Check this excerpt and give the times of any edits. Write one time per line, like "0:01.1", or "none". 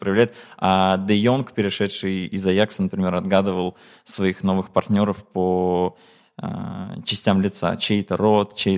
none